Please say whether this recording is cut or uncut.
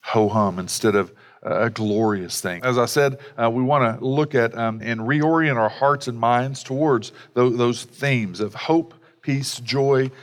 cut